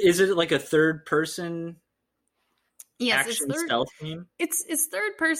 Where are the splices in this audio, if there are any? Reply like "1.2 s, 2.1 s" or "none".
none